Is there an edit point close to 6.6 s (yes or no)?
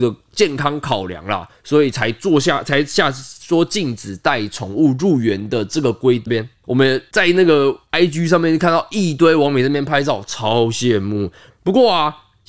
yes